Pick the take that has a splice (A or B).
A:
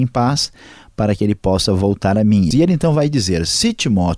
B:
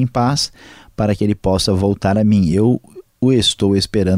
A